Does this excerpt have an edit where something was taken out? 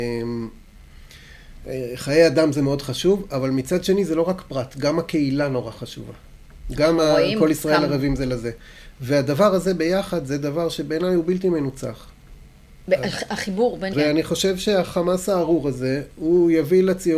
yes; 1 cut; at 13.9 s

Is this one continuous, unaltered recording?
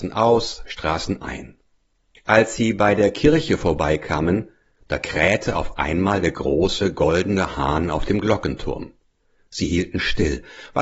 no; 1 cut; at 2.2 s

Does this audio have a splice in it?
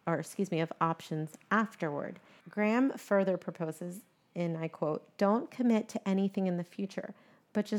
yes; 1 cut; at 2.4 s

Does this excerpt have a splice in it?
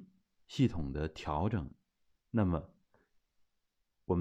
yes; 1 cut; at 2.1 s

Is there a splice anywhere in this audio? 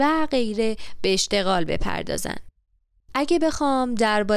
no; 0 cuts

